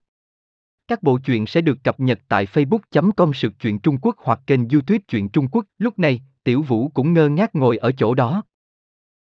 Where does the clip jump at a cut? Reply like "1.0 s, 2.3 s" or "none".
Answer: 5.7 s